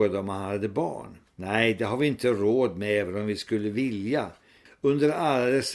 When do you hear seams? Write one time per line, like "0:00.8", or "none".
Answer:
0:01.3
0:04.7

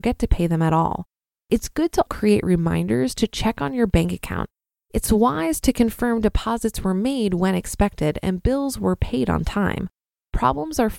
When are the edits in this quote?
0:02.1

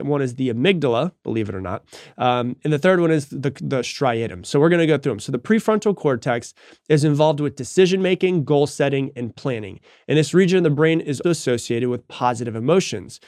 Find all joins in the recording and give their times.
0:11.2

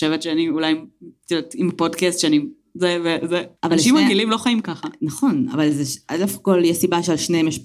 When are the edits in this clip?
0:03.6

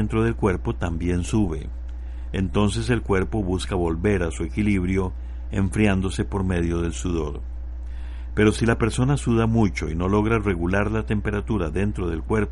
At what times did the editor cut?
none

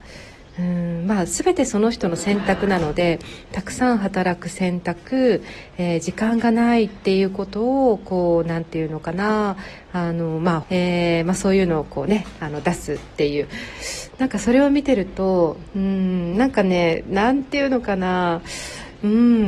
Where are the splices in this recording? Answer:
0:10.6

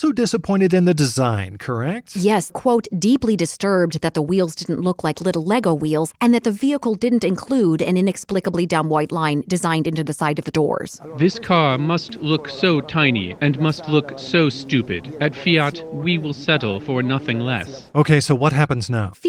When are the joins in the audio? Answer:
0:02.5

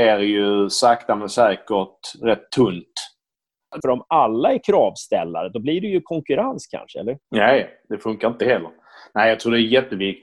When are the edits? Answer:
0:03.8

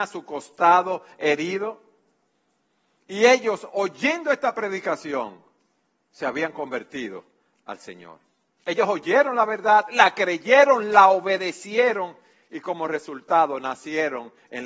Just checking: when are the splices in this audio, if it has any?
none

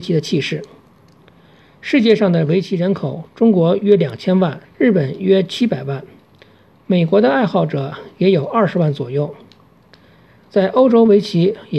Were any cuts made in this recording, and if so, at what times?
0:04.6

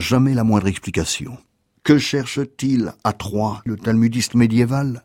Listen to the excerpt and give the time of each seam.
0:01.7
0:03.7

